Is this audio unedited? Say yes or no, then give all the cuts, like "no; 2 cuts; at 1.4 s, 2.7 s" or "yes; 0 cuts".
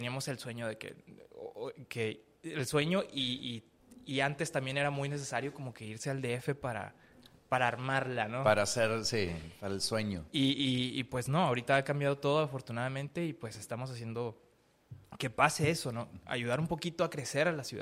yes; 0 cuts